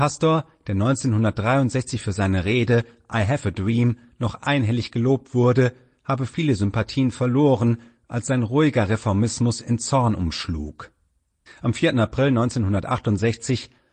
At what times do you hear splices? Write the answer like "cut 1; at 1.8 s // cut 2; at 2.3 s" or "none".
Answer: cut 1; at 11.5 s